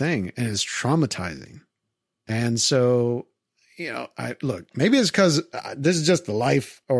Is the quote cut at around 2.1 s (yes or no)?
yes